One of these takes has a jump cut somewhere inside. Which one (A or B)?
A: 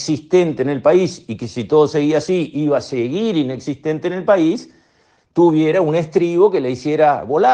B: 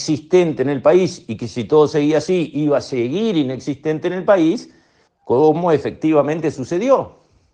B